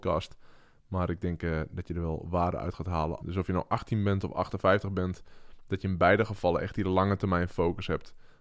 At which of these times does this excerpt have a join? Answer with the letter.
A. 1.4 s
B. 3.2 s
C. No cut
B